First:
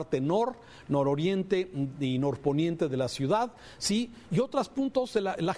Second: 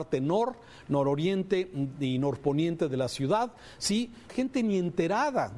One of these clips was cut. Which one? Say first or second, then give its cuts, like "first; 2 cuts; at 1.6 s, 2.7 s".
second; 1 cut; at 4.3 s